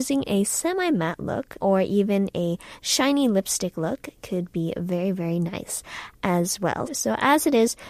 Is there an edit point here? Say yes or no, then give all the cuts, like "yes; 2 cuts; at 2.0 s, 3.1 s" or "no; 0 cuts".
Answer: yes; 2 cuts; at 1.6 s, 6.9 s